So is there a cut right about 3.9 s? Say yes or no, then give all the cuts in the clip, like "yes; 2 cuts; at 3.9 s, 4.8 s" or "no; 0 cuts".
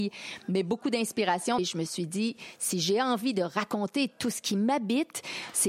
no; 1 cut; at 1.6 s